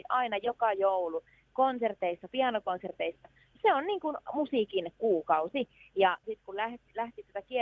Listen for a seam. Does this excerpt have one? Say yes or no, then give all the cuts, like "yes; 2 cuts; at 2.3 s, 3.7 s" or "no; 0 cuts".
yes; 3 cuts; at 2.3 s, 3.5 s, 6.2 s